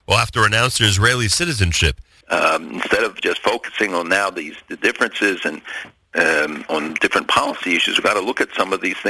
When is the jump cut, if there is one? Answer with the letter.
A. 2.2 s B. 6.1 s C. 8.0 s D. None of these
A